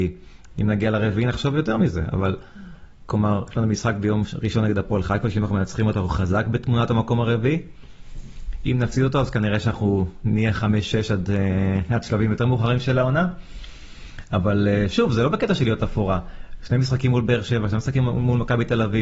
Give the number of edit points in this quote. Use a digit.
0